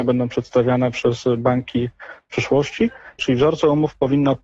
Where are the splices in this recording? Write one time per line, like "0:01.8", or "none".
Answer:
0:03.2

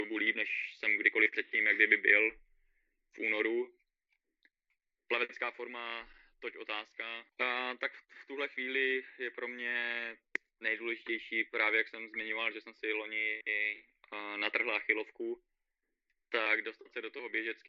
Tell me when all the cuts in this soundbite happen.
0:07.3

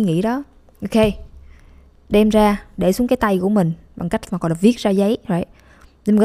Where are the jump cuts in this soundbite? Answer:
none

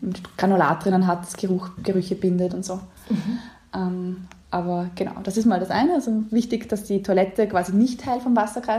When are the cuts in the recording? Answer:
none

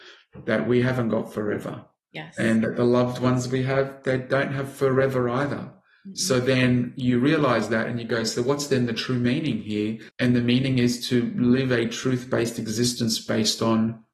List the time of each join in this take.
0:10.1

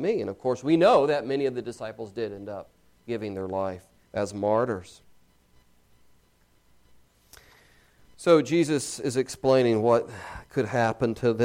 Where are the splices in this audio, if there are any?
0:04.1

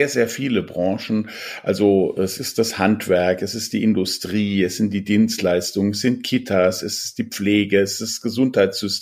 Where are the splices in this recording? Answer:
none

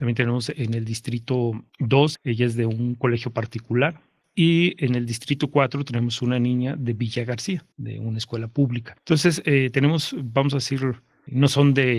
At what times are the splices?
0:02.1
0:04.2

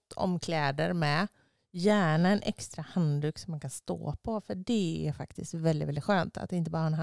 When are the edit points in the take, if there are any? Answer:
none

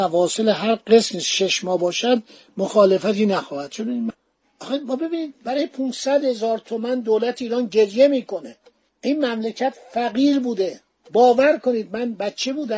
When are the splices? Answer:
none

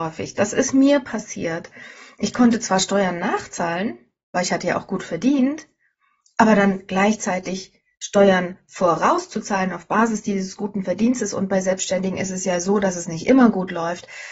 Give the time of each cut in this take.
none

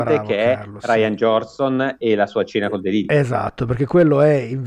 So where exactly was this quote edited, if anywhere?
none

